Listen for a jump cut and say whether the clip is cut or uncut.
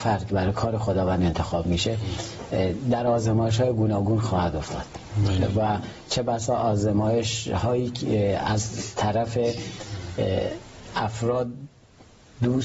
uncut